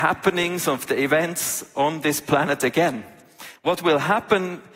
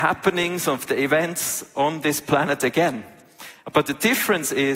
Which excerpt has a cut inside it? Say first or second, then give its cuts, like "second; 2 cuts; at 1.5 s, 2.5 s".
first; 1 cut; at 3.6 s